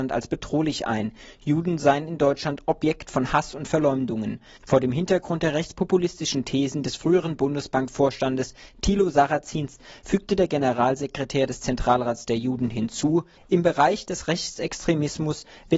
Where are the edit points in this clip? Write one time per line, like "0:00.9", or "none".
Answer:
0:04.6
0:13.4